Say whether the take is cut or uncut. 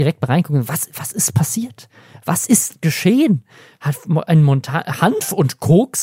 uncut